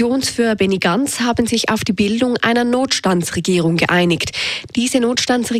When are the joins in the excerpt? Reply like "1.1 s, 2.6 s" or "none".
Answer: 4.7 s